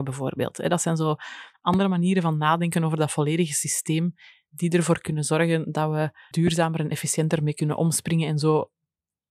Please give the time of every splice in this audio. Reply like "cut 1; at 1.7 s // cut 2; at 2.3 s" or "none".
cut 1; at 6.3 s